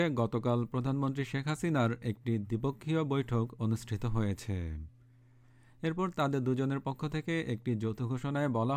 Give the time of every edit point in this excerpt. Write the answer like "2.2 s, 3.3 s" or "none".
none